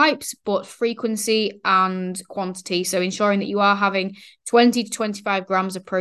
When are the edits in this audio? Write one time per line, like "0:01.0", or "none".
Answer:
none